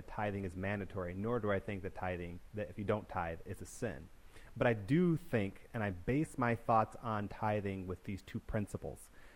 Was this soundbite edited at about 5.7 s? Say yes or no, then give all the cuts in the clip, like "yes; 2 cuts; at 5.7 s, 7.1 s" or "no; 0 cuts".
no; 0 cuts